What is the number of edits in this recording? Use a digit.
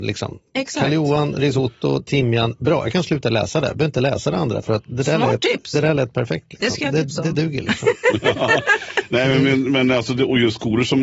0